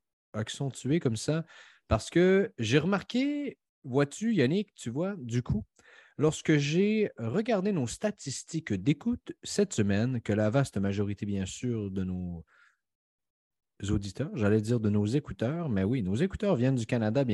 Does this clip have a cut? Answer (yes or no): no